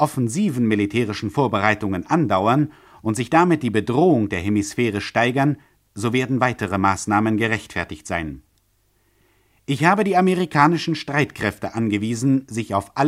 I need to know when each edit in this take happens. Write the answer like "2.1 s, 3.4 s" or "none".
none